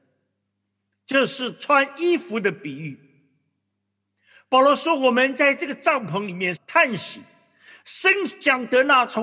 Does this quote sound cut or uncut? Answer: cut